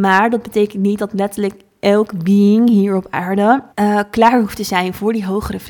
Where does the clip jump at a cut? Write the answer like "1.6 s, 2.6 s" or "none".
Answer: 3.7 s

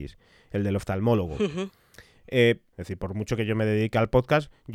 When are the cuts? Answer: 2.7 s

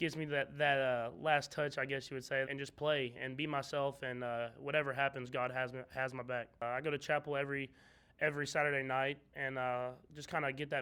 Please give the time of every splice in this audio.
2.5 s

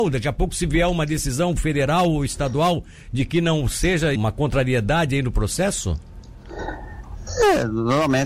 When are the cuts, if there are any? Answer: 4.2 s

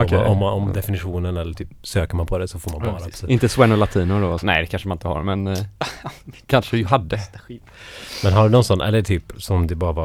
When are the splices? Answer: 4.4 s

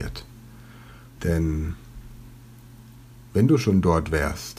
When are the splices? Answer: 1.2 s

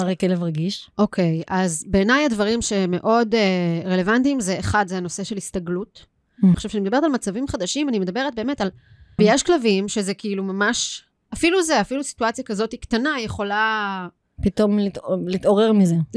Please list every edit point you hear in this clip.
6.5 s, 9.2 s

